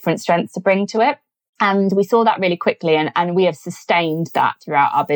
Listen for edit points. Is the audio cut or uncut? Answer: uncut